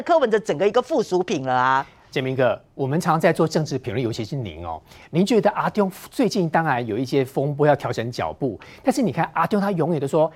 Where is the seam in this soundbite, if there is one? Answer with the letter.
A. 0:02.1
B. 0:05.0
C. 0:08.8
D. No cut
D